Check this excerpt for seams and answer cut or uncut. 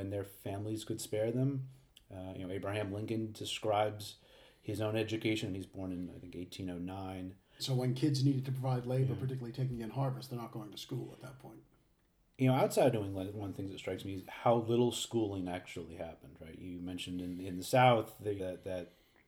cut